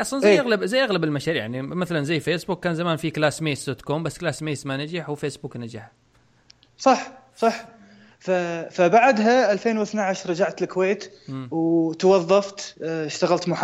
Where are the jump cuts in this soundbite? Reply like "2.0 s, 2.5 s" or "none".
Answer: none